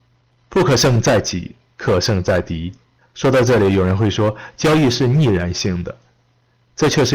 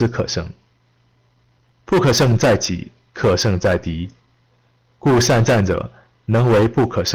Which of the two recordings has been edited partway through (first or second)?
first